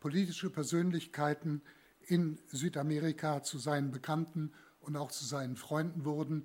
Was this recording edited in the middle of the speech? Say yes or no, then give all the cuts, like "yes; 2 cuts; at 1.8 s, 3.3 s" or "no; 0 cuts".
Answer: no; 0 cuts